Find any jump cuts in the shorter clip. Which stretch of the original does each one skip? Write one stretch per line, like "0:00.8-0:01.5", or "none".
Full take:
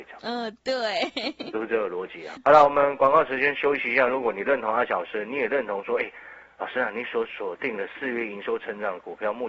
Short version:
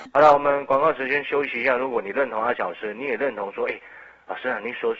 none